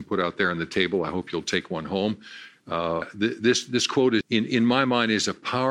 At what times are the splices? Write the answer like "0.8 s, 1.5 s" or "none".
3.0 s, 4.2 s